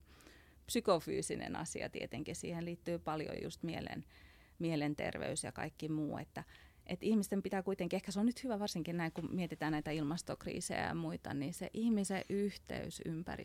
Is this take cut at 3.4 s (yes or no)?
no